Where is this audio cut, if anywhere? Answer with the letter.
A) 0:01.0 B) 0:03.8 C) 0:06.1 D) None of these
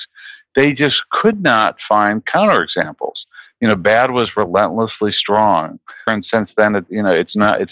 C